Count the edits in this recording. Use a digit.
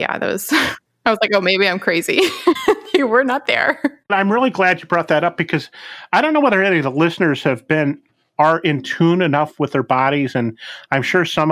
2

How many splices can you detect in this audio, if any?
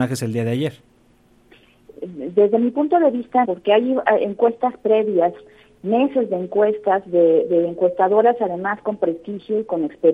1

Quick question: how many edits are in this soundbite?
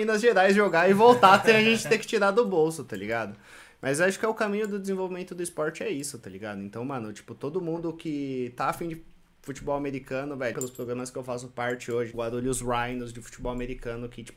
2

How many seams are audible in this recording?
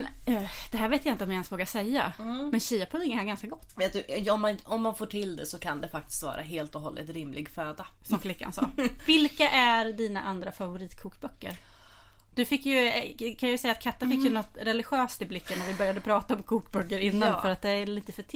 1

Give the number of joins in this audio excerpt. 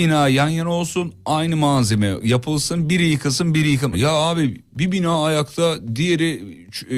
1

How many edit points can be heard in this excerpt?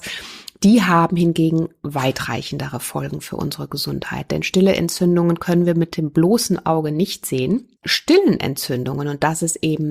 1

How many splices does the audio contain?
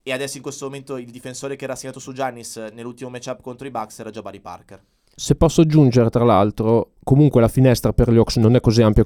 2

